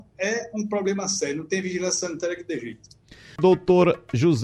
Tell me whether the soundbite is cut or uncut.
uncut